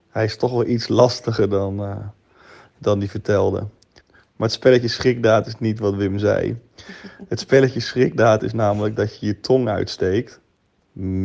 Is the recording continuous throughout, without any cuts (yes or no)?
no